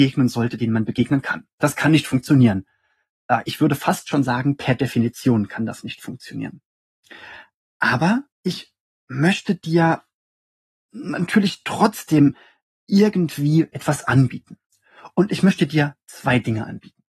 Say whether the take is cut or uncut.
cut